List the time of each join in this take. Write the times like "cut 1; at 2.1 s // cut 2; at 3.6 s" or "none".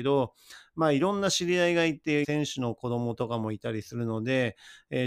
cut 1; at 2.2 s